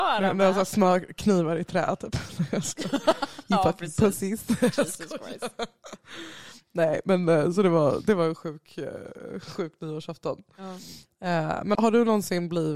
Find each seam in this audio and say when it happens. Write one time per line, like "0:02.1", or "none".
0:11.7